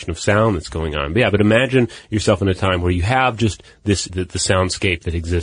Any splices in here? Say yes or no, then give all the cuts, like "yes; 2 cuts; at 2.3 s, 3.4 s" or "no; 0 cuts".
yes; 1 cut; at 4.1 s